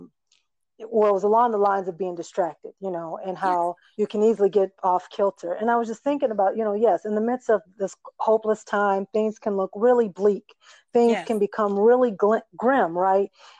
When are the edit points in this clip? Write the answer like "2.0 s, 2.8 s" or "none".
none